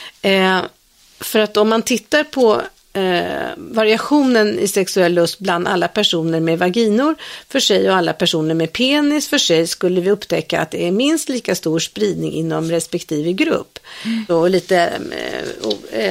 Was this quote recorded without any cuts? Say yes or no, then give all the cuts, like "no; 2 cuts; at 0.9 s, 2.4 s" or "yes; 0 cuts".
no; 1 cut; at 14.3 s